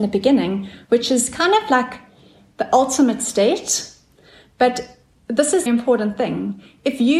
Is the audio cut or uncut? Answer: cut